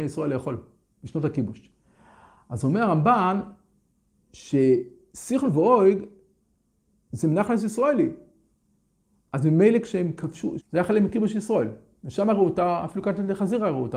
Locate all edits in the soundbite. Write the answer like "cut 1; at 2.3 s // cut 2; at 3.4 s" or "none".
cut 1; at 10.6 s